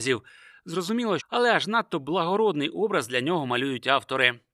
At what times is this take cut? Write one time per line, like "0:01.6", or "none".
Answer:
0:01.2